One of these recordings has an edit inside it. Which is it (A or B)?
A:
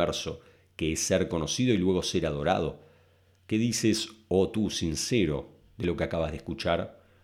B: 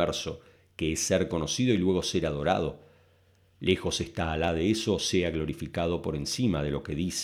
A